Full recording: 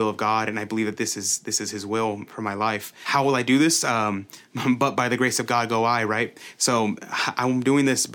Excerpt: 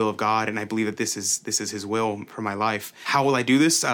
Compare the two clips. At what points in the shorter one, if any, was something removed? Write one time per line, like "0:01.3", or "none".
none